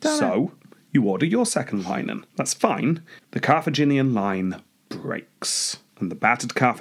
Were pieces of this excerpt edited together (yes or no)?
yes